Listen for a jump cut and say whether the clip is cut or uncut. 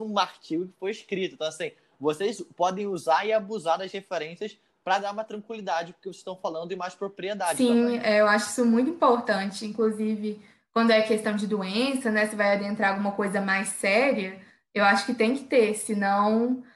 uncut